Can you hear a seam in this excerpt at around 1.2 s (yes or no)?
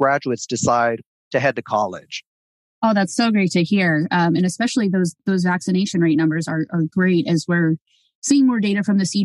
yes